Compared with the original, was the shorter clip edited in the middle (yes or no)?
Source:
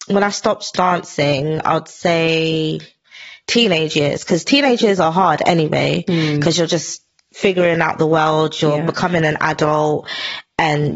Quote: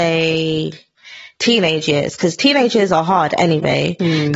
no